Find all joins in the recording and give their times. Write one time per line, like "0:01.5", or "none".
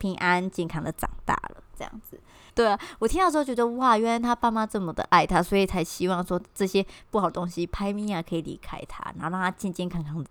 0:02.5